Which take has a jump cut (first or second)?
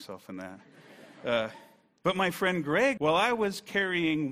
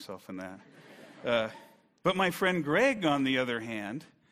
first